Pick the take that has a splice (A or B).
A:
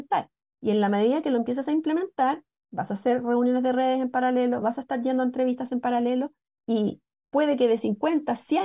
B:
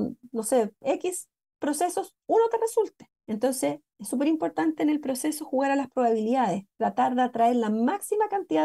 A